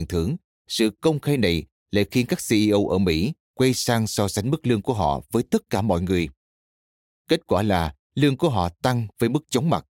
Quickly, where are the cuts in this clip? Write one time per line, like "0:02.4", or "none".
none